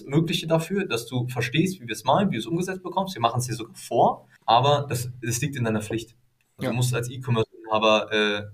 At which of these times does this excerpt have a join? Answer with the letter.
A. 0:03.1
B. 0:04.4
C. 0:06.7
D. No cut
B